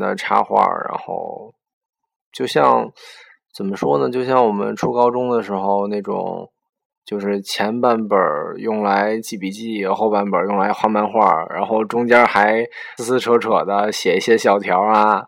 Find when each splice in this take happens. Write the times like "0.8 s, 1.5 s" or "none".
13.0 s